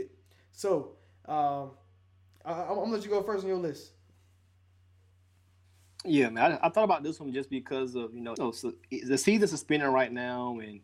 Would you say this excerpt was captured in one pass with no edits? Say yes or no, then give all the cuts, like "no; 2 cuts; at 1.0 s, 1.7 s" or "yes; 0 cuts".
no; 1 cut; at 8.4 s